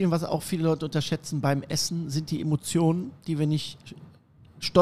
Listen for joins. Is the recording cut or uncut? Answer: uncut